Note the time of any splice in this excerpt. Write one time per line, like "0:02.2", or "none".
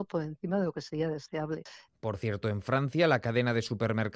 0:01.9